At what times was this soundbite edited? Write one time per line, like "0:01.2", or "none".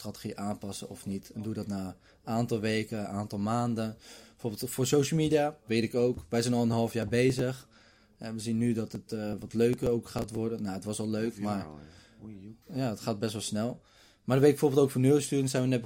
0:12.6

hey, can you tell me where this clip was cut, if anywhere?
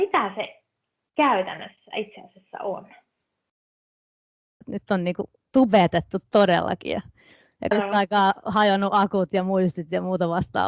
0:04.6
0:07.7

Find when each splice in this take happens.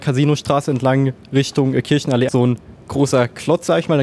0:02.3

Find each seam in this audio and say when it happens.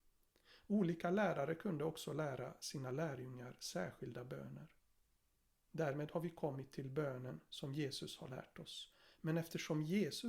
0:05.7
0:09.1

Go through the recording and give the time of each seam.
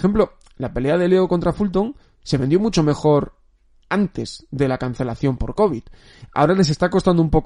none

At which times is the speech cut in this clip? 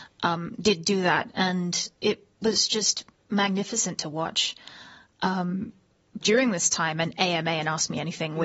0:06.2

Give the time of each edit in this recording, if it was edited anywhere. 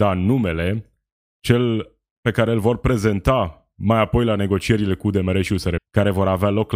0:05.8

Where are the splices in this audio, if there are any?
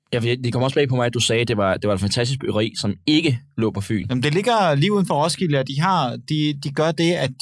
none

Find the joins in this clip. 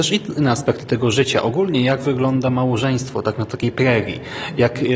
none

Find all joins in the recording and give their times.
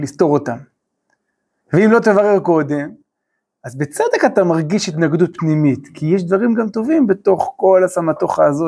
none

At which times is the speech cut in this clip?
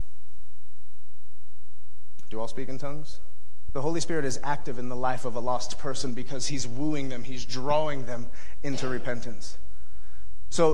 0:03.7

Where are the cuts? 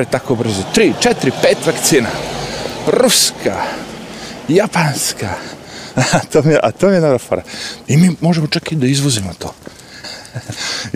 0:07.8
0:10.0

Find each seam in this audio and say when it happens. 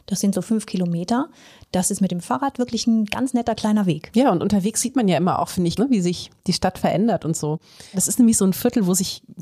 0:05.8
0:07.9

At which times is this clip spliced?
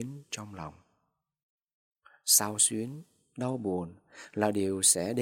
none

